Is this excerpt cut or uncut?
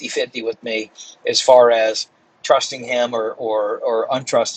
uncut